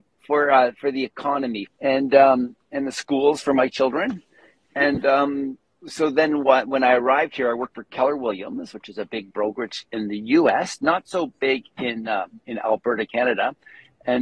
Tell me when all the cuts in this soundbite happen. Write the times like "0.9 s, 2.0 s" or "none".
1.7 s